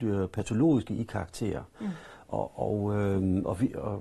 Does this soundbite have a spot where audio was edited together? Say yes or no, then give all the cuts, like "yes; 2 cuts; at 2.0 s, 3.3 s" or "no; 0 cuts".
no; 0 cuts